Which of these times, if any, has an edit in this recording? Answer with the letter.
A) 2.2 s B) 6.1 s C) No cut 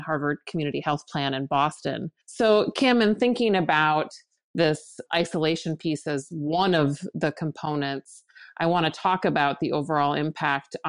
A